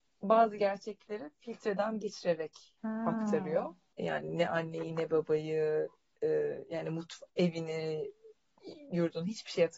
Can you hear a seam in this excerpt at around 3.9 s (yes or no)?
yes